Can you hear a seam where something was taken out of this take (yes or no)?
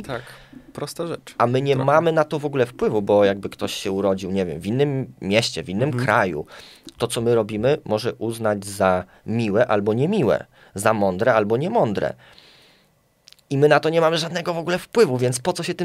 no